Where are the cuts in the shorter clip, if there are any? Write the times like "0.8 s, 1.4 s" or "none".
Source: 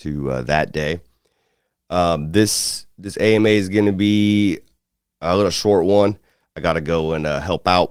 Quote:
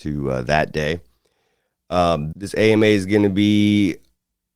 2.3 s